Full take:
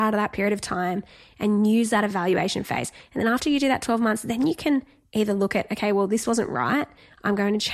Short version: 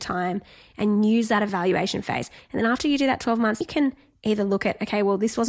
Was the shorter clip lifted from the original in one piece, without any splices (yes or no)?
no